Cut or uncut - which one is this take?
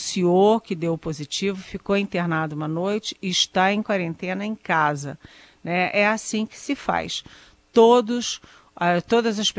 uncut